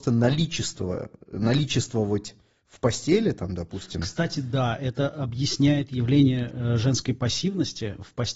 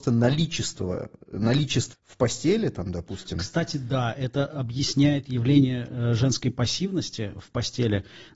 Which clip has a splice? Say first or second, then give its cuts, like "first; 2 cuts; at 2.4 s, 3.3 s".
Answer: second; 1 cut; at 1.9 s